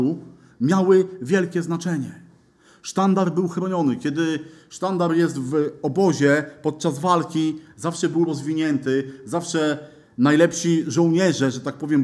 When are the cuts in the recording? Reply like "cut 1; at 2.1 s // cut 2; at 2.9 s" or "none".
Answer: none